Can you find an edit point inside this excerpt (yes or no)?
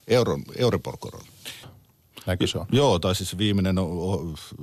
yes